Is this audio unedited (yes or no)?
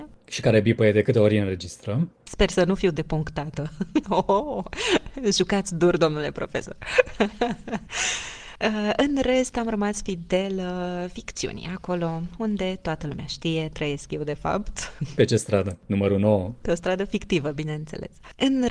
no